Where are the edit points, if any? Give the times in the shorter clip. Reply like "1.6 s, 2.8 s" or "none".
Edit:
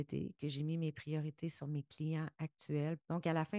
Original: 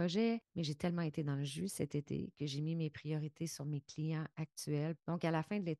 none